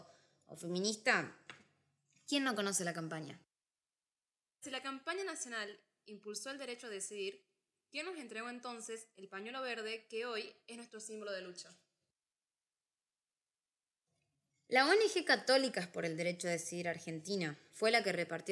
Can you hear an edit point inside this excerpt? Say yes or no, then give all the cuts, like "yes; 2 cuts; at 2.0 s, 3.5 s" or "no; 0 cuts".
no; 0 cuts